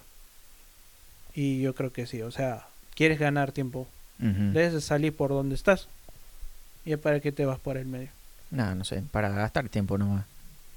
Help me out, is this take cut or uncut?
uncut